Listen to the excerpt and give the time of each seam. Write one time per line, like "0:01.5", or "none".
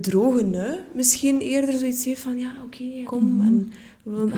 0:03.0